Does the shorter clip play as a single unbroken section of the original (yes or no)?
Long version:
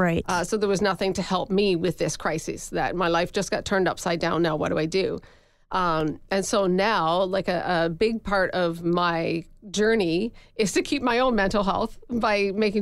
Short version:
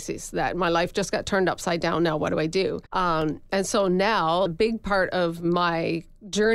no